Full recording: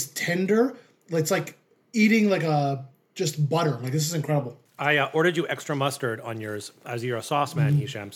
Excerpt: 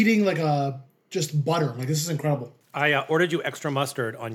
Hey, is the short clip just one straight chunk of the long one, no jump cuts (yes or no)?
yes